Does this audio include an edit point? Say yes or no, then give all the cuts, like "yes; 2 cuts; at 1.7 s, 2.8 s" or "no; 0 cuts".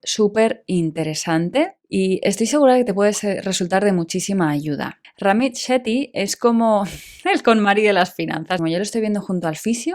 yes; 2 cuts; at 5.0 s, 8.6 s